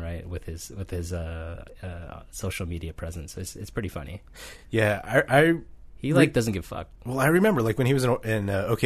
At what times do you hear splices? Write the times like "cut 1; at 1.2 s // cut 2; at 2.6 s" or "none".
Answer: none